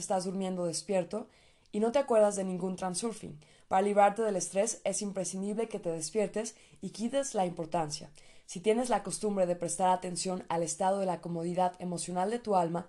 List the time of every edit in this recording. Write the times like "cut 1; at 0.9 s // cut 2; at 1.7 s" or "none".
none

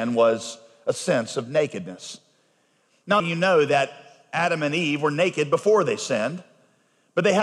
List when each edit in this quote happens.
cut 1; at 3.2 s

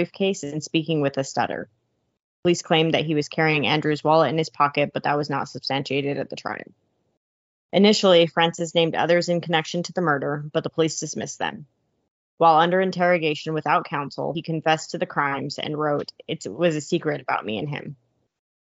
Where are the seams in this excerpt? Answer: none

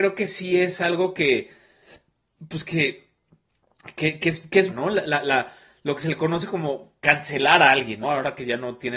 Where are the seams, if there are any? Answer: cut 1; at 4.7 s // cut 2; at 8.0 s

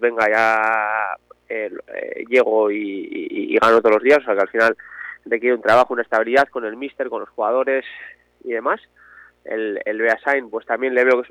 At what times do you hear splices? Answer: none

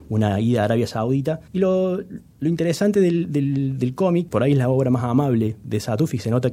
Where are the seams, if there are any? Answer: cut 1; at 1.5 s // cut 2; at 4.3 s

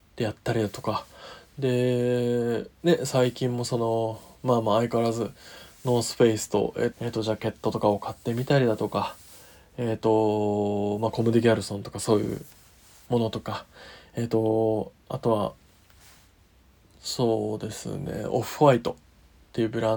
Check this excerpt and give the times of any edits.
cut 1; at 6.9 s

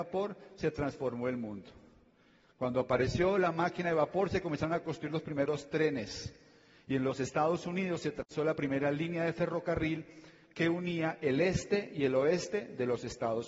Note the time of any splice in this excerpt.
none

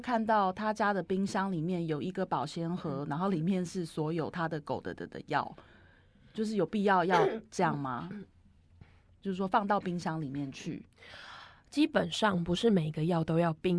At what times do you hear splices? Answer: none

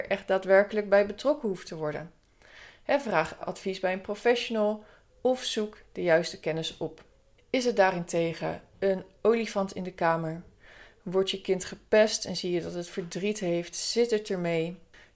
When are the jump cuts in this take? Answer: cut 1; at 3.4 s

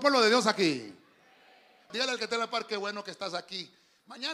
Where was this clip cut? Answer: cut 1; at 1.9 s

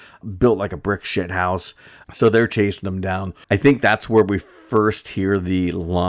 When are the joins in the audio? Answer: cut 1; at 2.0 s // cut 2; at 3.4 s

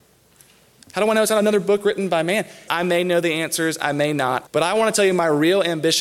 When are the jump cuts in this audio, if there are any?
cut 1; at 2.7 s // cut 2; at 4.5 s

